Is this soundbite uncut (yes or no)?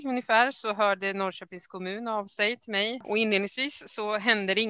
no